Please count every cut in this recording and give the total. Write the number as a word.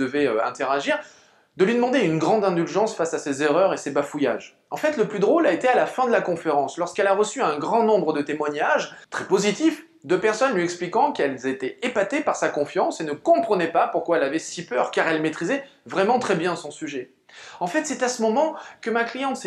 one